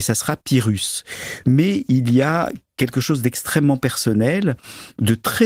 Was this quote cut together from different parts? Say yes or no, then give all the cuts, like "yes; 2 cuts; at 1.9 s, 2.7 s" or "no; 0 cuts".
yes; 1 cut; at 1.4 s